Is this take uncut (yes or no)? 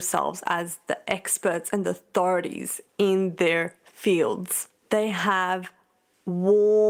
yes